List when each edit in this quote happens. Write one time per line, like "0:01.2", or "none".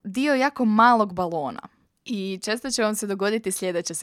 none